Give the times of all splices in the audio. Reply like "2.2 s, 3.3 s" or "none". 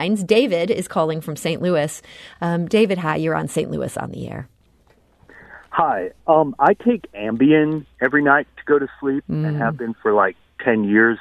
none